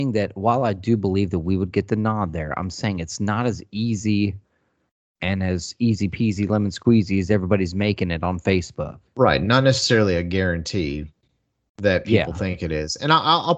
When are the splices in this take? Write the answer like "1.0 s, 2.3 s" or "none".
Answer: none